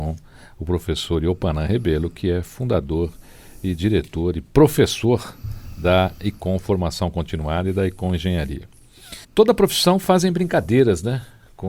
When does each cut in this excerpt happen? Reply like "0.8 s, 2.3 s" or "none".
9.2 s